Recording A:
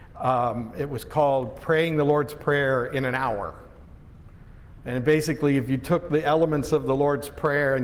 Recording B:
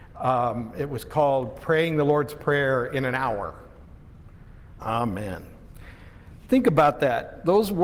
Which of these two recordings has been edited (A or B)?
B